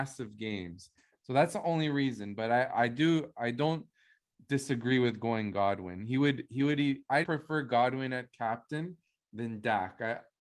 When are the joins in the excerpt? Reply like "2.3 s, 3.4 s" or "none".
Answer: 7.2 s